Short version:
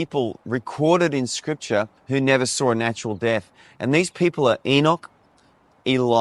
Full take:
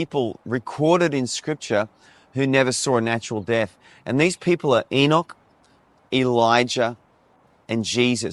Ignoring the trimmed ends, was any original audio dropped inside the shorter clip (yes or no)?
yes